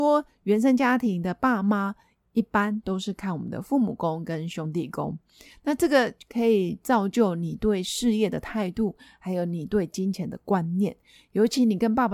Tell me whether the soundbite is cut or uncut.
uncut